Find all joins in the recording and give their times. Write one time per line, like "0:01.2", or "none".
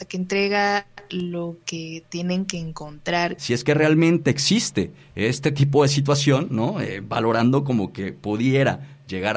0:03.4